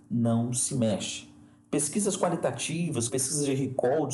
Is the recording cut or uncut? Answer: cut